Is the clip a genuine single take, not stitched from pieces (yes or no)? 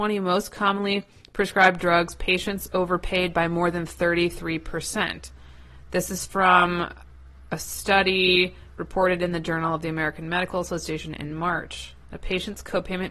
no